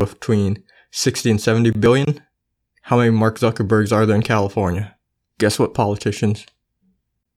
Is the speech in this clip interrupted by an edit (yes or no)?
yes